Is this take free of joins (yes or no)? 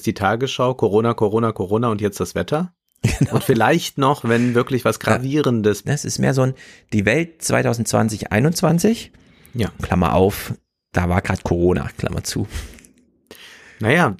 no